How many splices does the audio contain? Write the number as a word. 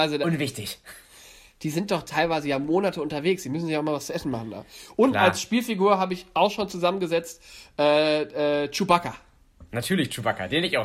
zero